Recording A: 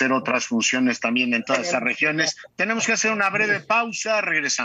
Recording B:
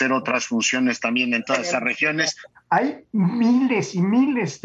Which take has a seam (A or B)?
B